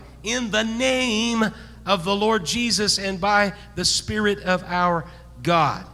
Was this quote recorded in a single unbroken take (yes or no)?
yes